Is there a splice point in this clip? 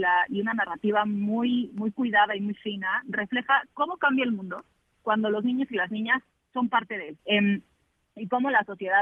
yes; 1 cut; at 7.2 s

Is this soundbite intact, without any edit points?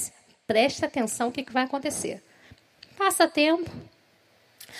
yes; 0 cuts

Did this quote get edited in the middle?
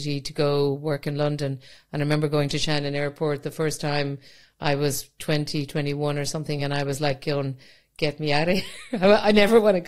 no; 0 cuts

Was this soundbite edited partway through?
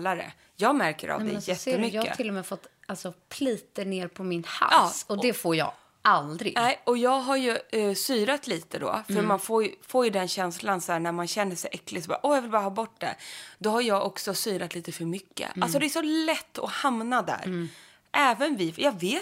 no; 0 cuts

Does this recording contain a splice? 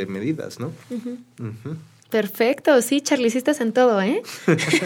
no; 0 cuts

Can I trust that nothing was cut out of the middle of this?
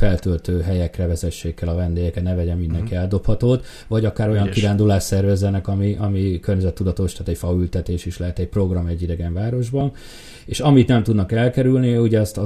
yes; 0 cuts

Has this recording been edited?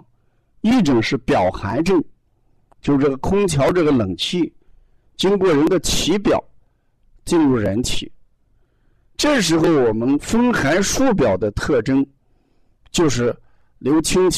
no; 0 cuts

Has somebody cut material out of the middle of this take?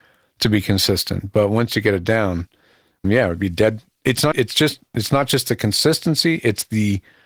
yes; 2 cuts; at 3.0 s, 4.3 s

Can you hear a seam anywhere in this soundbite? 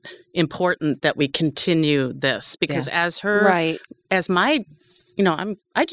no; 0 cuts

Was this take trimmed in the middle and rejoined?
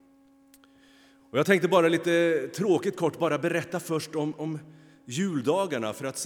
no; 0 cuts

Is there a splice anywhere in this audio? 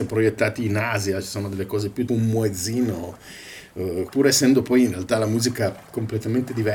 yes; 2 cuts; at 2.1 s, 4.1 s

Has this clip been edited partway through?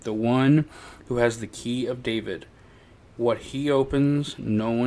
no; 0 cuts

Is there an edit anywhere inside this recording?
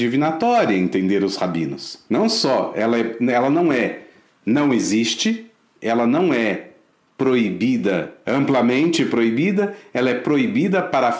no; 0 cuts

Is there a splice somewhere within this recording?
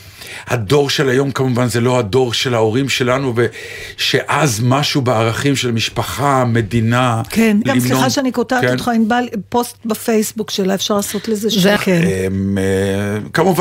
yes; 2 cuts; at 7.7 s, 11.8 s

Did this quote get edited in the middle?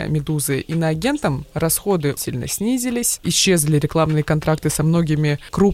yes; 2 cuts; at 2.2 s, 3.2 s

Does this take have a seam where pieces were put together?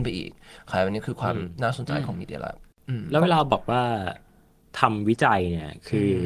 no; 0 cuts

